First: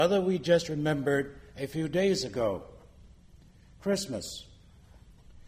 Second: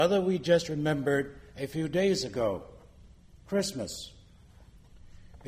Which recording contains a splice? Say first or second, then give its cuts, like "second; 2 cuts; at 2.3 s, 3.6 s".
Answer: second; 1 cut; at 3.4 s